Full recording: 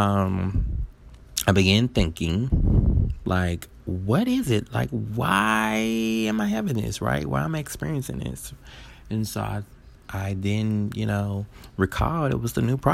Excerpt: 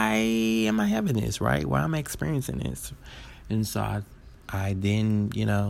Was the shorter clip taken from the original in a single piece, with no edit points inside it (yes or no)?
yes